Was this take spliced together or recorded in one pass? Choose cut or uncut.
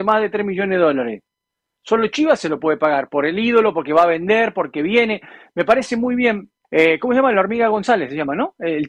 cut